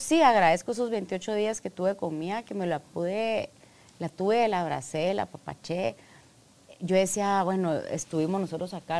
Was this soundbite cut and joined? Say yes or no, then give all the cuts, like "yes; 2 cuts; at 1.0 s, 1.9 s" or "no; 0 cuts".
no; 0 cuts